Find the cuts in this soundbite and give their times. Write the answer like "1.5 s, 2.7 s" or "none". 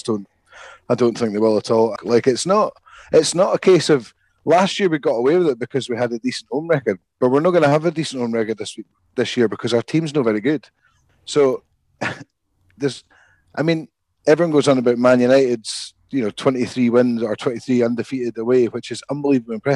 2.0 s